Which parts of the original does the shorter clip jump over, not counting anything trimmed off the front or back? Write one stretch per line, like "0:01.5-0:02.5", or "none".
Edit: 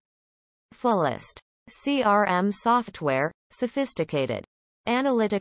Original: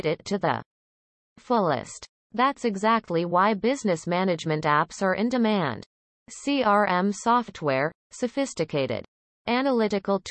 0:02.2-0:06.1